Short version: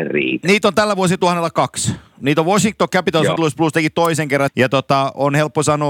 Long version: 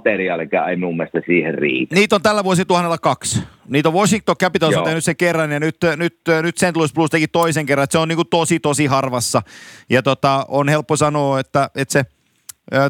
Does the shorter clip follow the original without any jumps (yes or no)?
no